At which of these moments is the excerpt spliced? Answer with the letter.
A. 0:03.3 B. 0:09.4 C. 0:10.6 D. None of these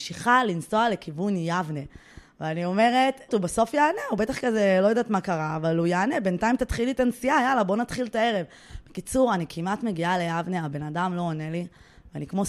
A